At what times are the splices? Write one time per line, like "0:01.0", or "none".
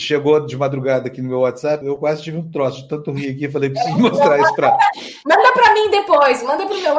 0:01.8